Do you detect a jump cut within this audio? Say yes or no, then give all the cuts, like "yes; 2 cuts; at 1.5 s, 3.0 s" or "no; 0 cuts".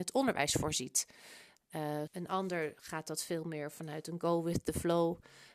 yes; 1 cut; at 2.1 s